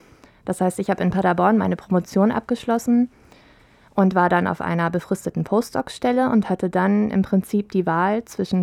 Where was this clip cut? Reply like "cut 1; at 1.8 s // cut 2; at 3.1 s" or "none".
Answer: none